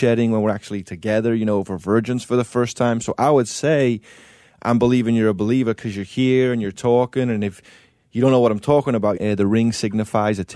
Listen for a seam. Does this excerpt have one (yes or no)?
yes